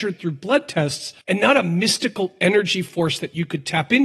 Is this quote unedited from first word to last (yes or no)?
no